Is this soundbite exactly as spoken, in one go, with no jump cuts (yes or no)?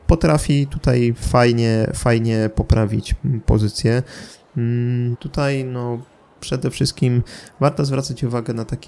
no